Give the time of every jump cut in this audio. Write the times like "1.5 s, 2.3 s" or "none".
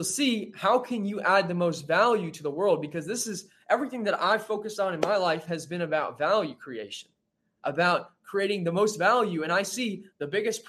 none